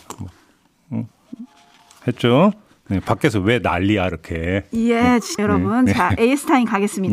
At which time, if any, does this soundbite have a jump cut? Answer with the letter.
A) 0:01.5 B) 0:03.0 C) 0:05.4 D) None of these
C